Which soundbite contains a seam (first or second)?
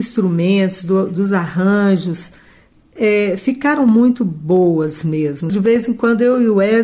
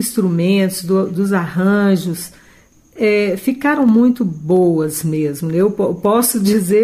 first